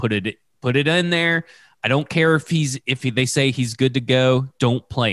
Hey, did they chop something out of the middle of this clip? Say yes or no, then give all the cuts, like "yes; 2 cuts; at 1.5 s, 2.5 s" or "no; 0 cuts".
no; 0 cuts